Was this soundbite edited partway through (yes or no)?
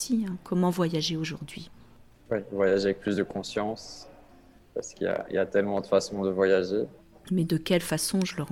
yes